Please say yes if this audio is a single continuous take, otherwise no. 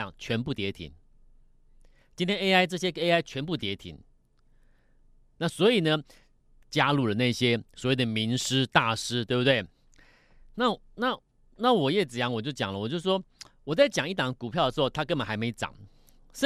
no